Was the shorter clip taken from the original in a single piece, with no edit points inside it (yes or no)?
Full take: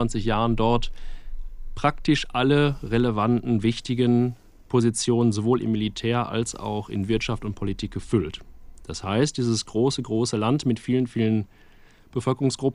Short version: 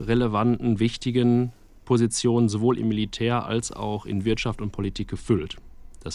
yes